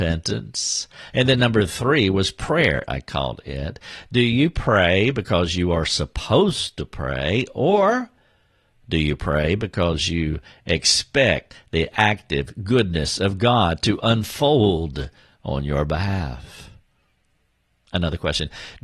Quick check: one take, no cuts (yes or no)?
no